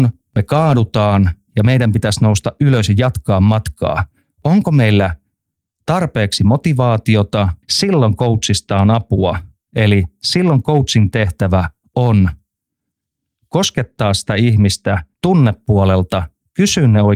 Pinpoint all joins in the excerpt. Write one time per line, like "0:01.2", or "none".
0:07.6
0:15.1